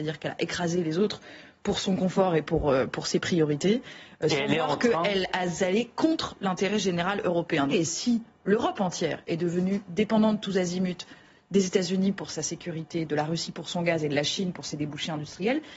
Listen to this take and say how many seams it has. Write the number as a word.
one